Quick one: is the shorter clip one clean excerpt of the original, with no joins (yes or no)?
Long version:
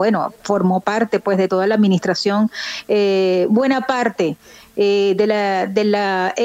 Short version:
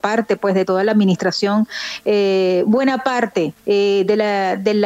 no